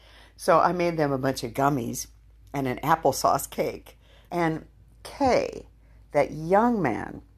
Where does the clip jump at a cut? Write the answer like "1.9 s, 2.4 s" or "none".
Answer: 4.3 s